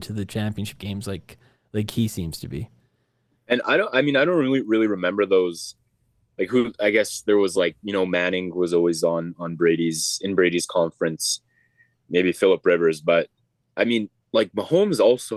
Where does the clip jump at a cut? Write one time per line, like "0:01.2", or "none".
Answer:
none